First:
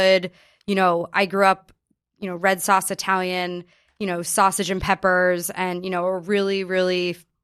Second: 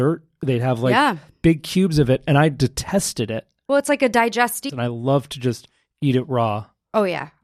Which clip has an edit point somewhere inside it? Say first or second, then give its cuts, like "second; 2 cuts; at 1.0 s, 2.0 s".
second; 1 cut; at 4.7 s